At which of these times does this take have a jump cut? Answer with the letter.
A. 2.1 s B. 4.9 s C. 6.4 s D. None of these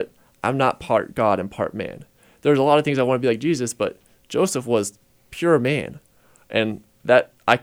D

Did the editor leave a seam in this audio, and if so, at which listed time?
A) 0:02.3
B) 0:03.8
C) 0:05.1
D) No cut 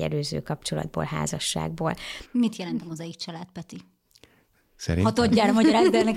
A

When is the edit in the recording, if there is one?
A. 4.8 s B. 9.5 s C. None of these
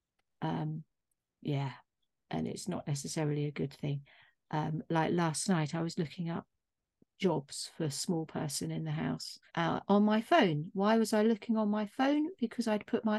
B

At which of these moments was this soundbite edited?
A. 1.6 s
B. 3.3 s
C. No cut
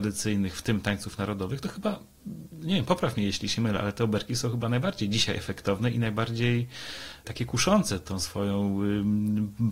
C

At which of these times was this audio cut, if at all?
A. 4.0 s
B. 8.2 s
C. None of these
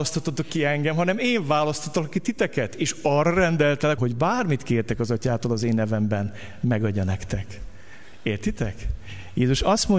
A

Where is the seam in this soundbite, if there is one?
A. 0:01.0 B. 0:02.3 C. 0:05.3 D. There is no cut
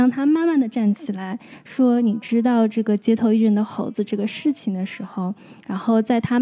D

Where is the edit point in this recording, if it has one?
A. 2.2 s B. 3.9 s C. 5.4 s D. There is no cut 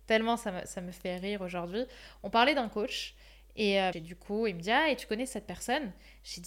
B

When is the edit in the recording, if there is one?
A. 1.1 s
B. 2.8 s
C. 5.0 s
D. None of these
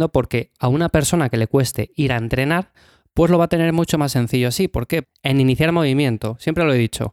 C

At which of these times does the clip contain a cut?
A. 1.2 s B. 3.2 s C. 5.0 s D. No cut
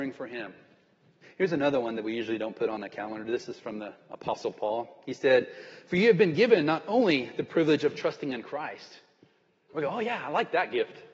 A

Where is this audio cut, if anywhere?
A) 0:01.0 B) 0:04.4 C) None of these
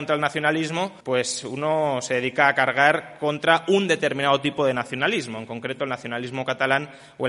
A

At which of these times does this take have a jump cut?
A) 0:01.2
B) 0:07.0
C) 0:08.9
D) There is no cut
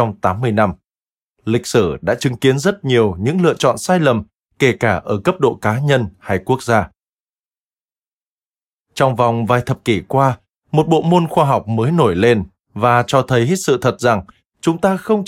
A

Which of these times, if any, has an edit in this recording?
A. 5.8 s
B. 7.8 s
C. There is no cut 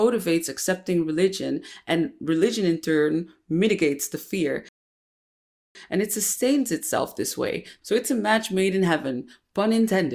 B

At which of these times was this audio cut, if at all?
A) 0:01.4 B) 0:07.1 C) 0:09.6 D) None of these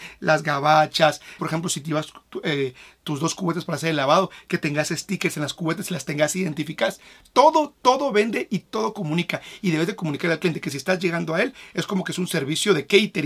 A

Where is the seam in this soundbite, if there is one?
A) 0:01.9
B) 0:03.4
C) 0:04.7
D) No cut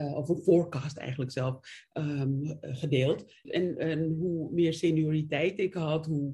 B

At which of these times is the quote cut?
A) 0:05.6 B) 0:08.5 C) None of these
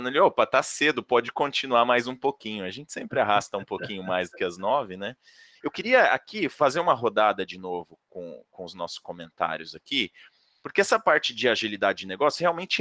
A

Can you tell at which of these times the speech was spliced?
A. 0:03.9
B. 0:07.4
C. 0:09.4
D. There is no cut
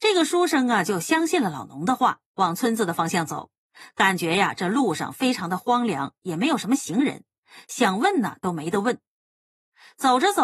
D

